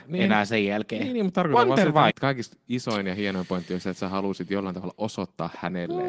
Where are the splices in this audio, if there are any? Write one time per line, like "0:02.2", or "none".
0:02.1